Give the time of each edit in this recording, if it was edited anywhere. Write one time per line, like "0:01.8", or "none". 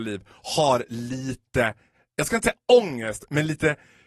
none